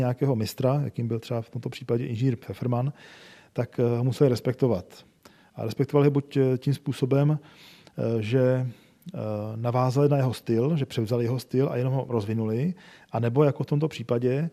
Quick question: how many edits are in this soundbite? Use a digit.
0